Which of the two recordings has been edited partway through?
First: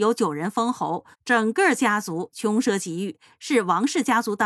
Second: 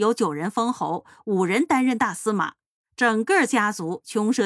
first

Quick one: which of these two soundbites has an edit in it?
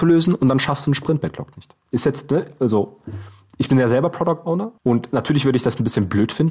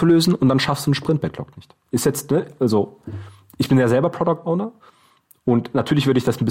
first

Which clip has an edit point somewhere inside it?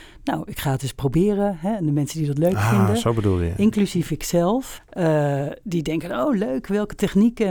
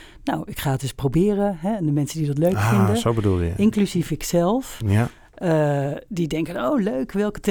first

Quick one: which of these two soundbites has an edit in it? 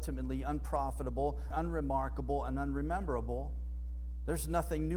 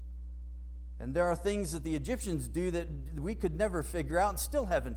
first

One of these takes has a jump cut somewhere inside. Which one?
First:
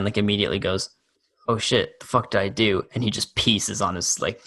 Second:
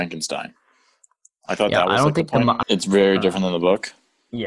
second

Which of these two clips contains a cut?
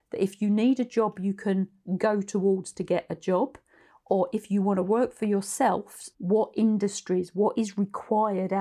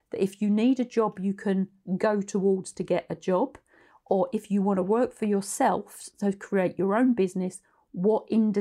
first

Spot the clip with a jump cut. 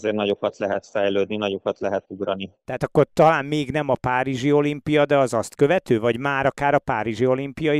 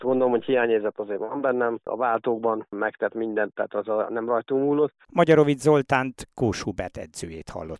second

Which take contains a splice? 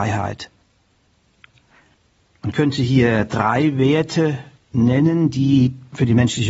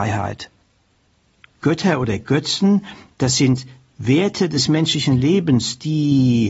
second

